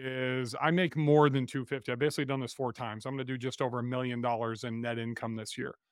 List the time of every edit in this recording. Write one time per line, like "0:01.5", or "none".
none